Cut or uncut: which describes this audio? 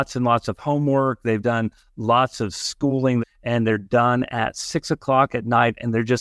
cut